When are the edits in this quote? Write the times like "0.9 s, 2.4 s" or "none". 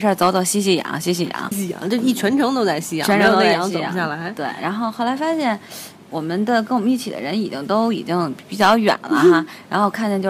1.5 s